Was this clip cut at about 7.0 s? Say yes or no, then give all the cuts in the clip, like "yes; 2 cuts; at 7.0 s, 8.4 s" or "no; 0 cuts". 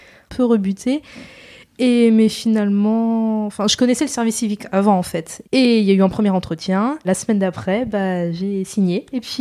yes; 2 cuts; at 5.4 s, 7.0 s